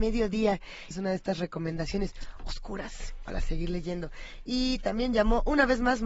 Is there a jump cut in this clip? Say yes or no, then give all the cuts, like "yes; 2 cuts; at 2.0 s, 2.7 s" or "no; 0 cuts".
yes; 1 cut; at 0.9 s